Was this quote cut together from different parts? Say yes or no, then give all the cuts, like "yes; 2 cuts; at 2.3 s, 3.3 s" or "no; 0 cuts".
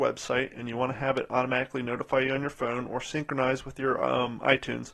no; 0 cuts